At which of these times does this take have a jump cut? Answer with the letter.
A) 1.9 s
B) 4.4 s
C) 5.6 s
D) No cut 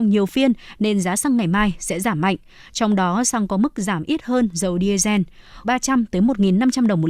C